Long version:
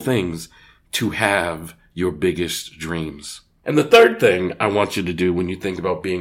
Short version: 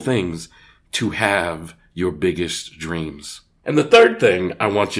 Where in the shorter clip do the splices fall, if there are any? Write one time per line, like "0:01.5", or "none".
none